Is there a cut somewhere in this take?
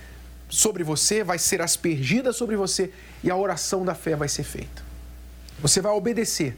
no; 0 cuts

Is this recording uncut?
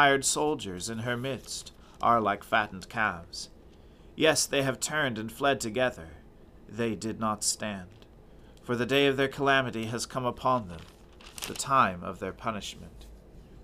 yes; 0 cuts

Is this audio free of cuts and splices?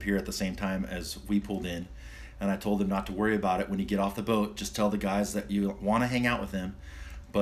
yes; 0 cuts

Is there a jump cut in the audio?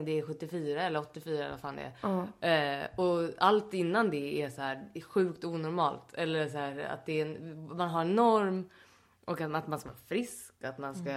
no; 0 cuts

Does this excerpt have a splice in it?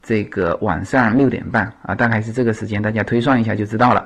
no; 0 cuts

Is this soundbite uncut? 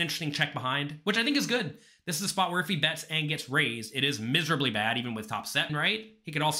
no; 1 cut; at 5.7 s

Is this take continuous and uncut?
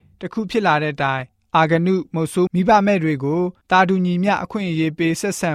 no; 1 cut; at 2.5 s

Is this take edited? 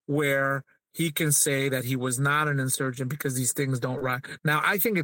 no; 0 cuts

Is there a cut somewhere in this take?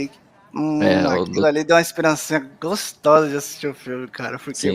no; 0 cuts

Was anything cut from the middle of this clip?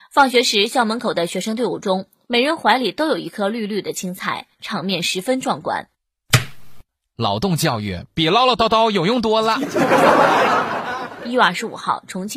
no; 0 cuts

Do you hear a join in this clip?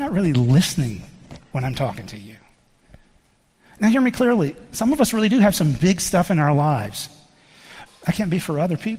yes; 1 cut; at 7.9 s

